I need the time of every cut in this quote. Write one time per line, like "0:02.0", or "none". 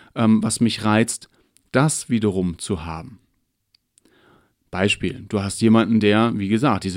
none